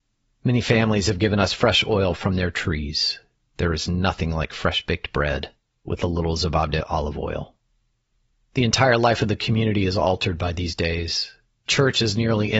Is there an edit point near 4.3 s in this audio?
no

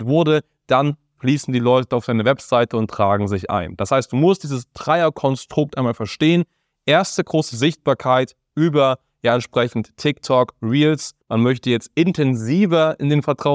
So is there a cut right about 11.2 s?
yes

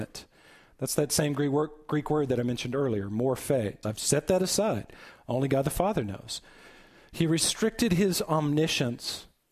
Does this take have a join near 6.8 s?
no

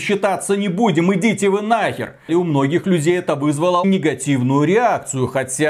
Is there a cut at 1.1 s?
no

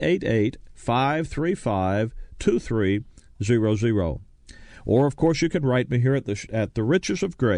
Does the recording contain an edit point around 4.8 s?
no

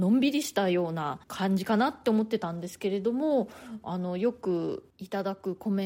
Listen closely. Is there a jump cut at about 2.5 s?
no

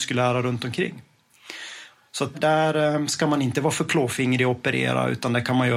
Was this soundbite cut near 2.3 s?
yes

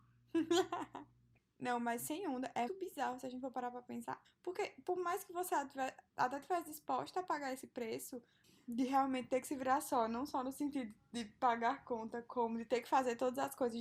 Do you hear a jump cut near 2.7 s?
yes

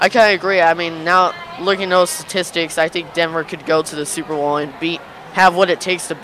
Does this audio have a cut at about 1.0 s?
no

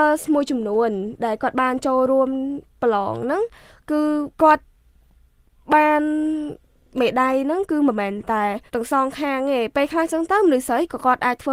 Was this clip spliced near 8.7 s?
yes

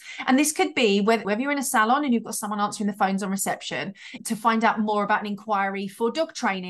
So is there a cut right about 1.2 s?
yes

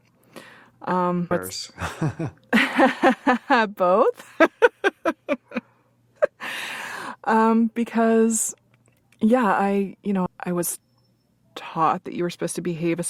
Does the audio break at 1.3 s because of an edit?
yes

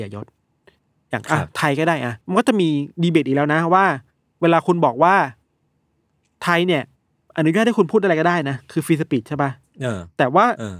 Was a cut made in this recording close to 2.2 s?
yes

